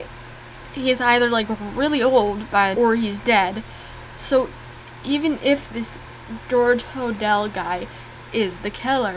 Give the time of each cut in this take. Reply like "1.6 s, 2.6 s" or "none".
2.7 s